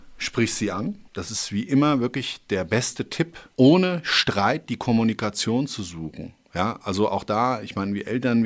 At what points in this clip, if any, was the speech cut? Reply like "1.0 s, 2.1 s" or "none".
none

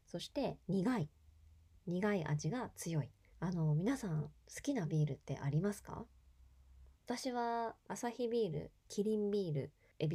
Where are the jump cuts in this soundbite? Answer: 3.3 s, 6.9 s

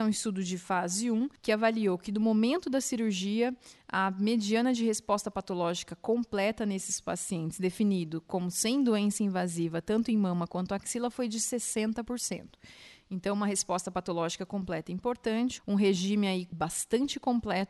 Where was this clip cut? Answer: 15.6 s

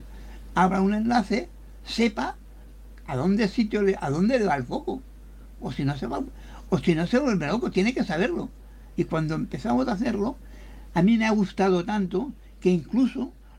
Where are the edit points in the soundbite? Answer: 8.9 s

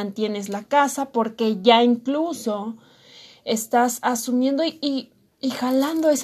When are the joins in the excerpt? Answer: none

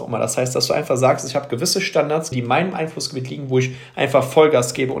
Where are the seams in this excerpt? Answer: 2.3 s

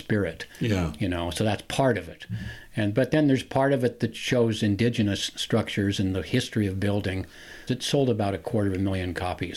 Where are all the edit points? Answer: 7.7 s

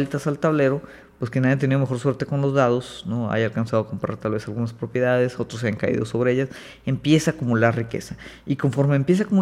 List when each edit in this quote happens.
none

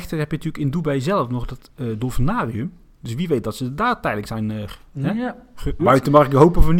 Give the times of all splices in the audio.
5.8 s

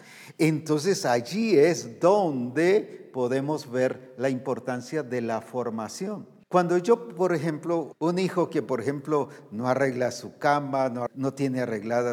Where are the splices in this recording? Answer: 6.4 s, 7.9 s, 11.1 s

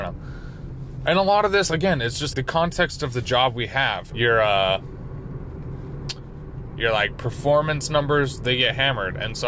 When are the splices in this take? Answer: 2.3 s, 4.1 s

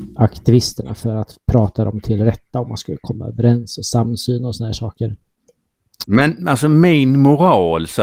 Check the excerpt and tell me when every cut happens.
6.0 s

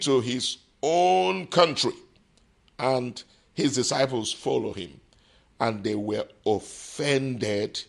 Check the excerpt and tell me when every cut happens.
5.5 s

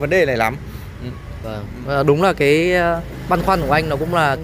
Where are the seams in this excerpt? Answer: 1.4 s

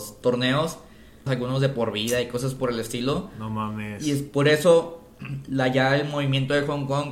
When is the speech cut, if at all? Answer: 1.3 s

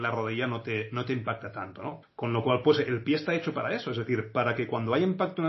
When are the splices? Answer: 2.0 s

